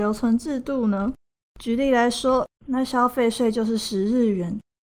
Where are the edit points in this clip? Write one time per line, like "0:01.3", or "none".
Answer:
0:01.4
0:02.6